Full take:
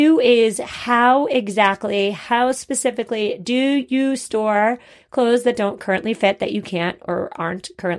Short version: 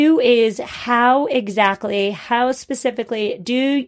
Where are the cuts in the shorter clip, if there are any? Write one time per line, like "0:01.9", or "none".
none